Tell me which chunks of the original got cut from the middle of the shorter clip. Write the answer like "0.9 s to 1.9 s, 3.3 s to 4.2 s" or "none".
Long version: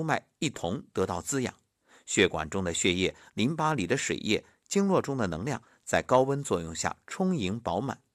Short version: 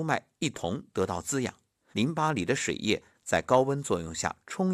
1.9 s to 3.3 s, 4.6 s to 5.7 s